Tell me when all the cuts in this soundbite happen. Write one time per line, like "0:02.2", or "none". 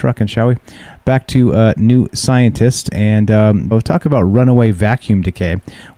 0:03.7